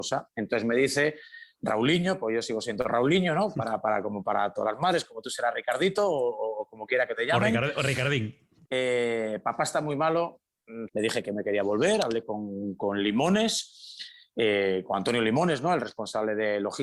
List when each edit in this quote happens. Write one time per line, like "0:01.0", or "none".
0:08.6
0:10.9